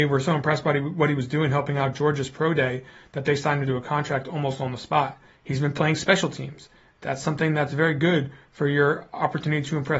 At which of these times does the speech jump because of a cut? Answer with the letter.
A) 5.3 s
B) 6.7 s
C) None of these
A